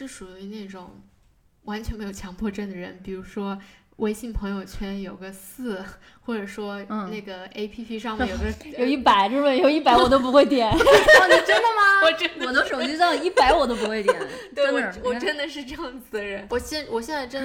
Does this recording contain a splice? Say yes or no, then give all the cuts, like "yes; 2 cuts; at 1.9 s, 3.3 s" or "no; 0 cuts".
yes; 1 cut; at 16.5 s